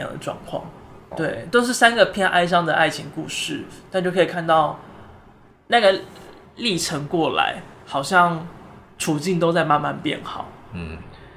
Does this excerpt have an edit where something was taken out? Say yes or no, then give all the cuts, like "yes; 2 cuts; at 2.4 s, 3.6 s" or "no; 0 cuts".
yes; 1 cut; at 1.1 s